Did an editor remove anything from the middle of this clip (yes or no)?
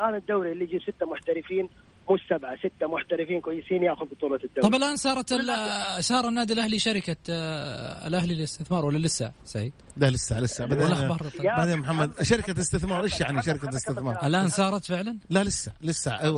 no